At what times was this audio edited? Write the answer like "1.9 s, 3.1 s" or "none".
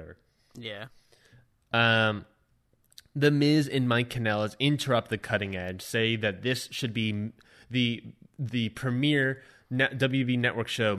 none